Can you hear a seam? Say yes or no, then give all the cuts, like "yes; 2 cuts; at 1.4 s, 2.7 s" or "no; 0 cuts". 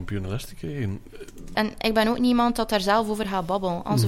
yes; 1 cut; at 1.5 s